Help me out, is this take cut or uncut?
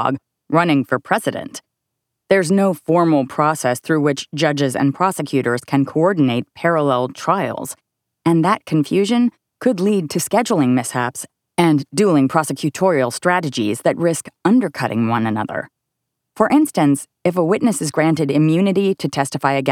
uncut